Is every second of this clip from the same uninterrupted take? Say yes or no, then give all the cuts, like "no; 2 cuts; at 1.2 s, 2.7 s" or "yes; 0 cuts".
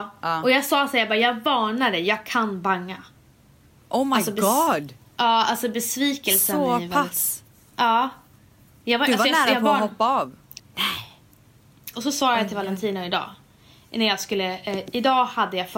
no; 2 cuts; at 10.6 s, 11.9 s